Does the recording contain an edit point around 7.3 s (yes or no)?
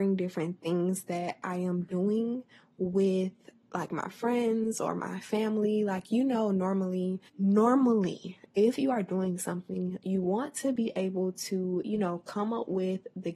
yes